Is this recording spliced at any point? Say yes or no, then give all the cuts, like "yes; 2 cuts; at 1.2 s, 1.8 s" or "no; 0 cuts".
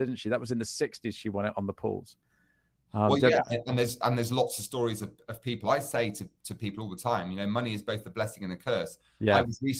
no; 0 cuts